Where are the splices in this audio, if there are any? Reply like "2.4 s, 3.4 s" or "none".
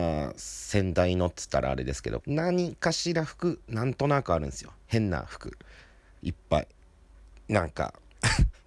2.2 s

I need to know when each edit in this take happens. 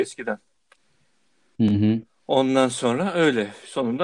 none

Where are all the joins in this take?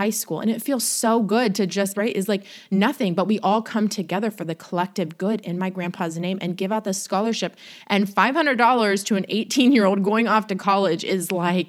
1.9 s

